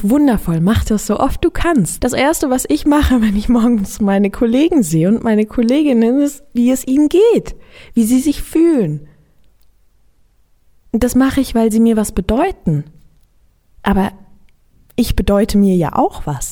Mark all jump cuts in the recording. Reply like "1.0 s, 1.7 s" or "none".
2.0 s, 6.6 s